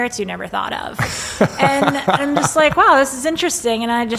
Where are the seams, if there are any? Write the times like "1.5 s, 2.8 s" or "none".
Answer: none